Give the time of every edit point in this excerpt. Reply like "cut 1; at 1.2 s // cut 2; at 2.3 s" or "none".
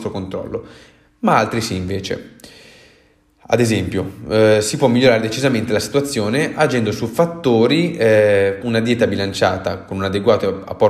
cut 1; at 8.6 s